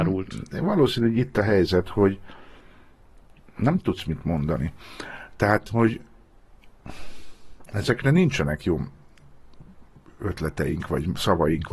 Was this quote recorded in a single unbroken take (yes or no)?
yes